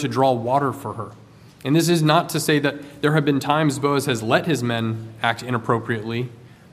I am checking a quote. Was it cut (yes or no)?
no